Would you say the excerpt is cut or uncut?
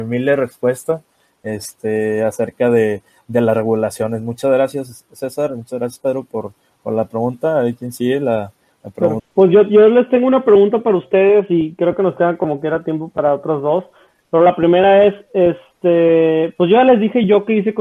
cut